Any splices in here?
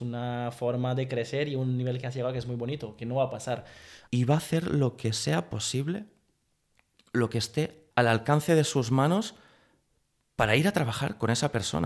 yes; 2 cuts; at 4.1 s, 7.9 s

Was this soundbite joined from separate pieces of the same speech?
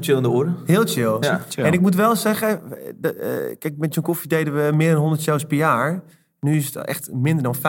no; 0 cuts

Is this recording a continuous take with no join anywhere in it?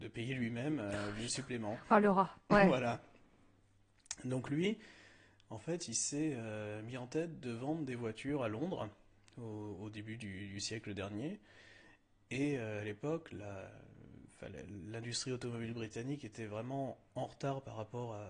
yes; 0 cuts

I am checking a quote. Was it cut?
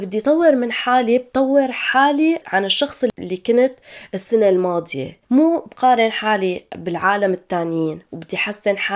yes; 2 cuts; at 2.4 s, 5.2 s

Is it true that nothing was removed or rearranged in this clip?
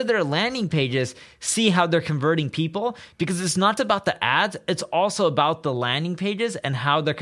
no; 1 cut; at 3.8 s

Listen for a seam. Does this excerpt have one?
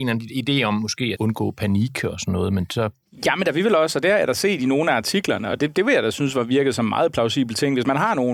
yes; 1 cut; at 1.1 s

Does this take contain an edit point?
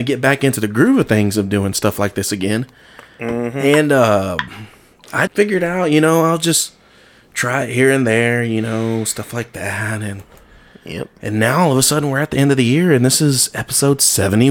yes; 1 cut; at 5.3 s

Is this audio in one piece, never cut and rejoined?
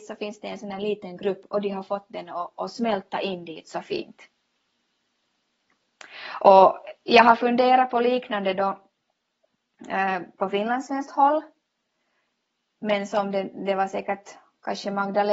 yes; 0 cuts

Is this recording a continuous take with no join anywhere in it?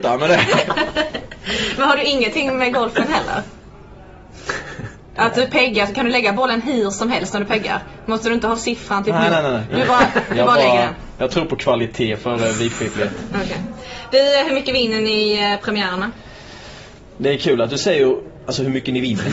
yes; 0 cuts

